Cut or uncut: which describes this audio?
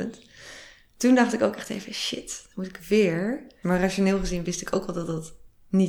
cut